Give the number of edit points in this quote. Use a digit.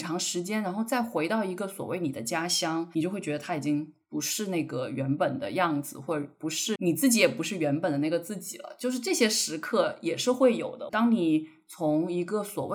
2